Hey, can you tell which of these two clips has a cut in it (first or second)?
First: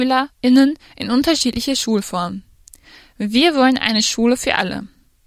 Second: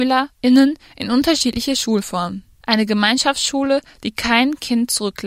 second